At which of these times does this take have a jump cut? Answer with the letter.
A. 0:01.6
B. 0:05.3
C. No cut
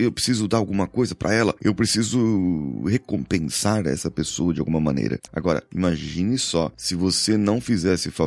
B